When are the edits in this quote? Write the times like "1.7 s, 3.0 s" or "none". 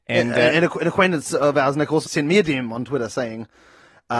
2.1 s